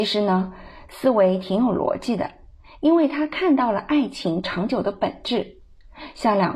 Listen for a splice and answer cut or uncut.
uncut